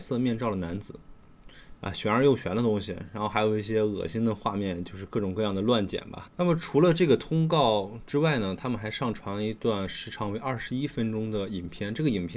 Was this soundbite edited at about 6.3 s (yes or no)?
yes